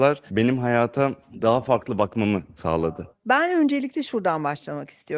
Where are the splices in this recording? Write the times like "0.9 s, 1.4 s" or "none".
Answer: none